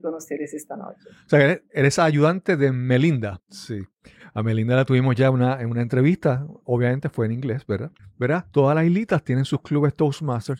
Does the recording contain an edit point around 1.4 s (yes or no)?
no